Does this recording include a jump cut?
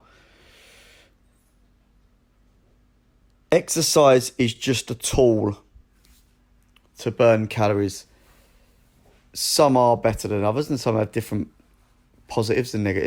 no; 0 cuts

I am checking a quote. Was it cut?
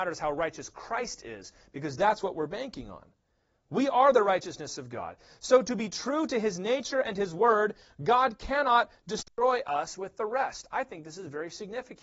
no; 0 cuts

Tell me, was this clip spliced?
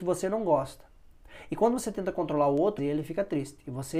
yes; 1 cut; at 2.8 s

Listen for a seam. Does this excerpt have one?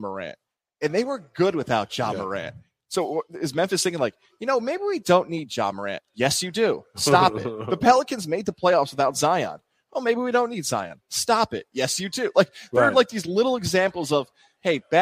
no; 0 cuts

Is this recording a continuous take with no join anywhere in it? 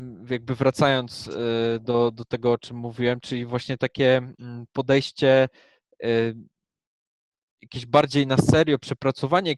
yes; 0 cuts

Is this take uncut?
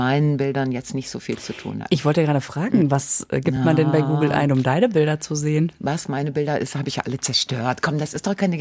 yes; 0 cuts

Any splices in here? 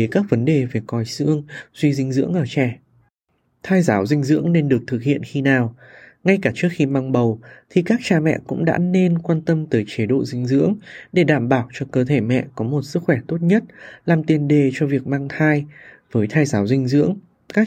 no; 0 cuts

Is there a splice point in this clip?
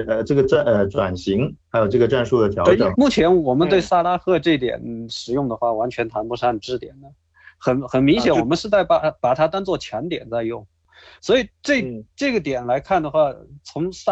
yes; 1 cut; at 2.9 s

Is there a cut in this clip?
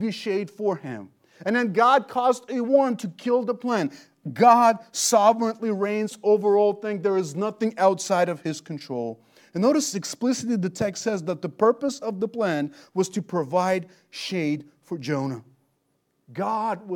no; 0 cuts

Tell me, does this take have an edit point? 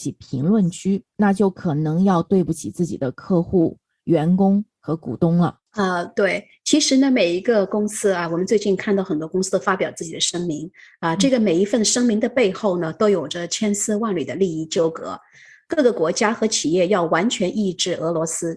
yes; 1 cut; at 5.7 s

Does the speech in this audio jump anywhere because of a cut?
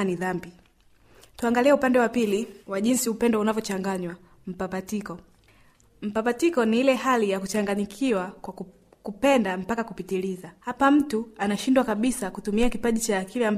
yes; 2 cuts; at 2.6 s, 10.6 s

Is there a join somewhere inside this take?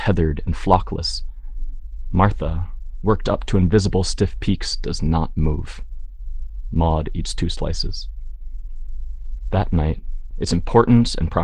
yes; 1 cut; at 10.3 s

